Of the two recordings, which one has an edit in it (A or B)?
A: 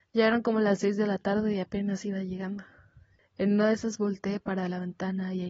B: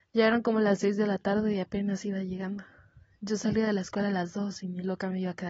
A